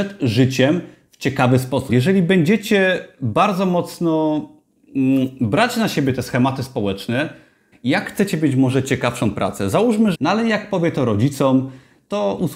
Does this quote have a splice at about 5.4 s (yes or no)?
no